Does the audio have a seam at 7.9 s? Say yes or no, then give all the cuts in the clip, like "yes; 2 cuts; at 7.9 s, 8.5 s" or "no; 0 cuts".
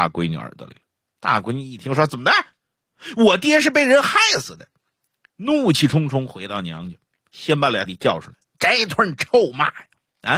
yes; 1 cut; at 7.9 s